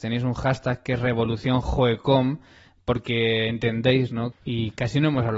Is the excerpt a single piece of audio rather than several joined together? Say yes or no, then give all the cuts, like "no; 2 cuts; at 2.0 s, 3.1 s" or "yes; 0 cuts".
no; 1 cut; at 4.3 s